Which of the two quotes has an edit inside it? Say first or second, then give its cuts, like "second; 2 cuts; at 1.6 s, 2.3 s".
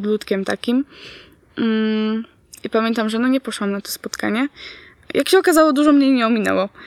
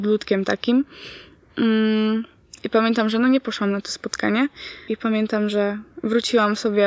second; 1 cut; at 4.9 s